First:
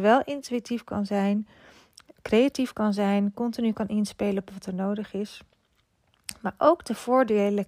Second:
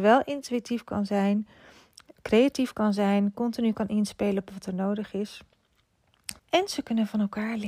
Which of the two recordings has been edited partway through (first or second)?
second